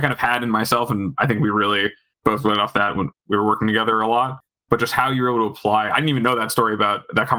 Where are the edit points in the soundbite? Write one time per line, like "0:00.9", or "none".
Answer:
0:03.1